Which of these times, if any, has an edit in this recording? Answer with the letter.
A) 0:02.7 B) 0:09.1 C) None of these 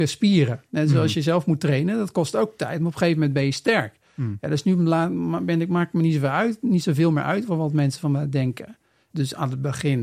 B